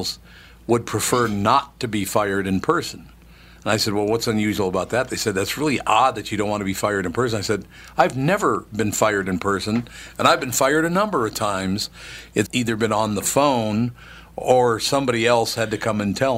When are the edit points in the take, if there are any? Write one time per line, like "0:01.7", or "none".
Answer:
0:12.5